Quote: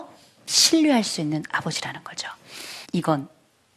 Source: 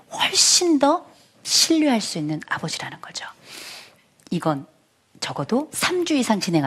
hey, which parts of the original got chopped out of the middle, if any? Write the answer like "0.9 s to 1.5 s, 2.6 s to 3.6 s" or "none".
3.8 s to 4.2 s